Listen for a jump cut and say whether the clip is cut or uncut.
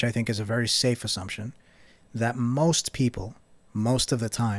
uncut